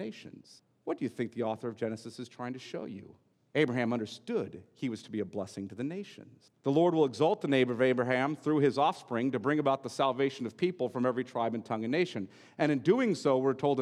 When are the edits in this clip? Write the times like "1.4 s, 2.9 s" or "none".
none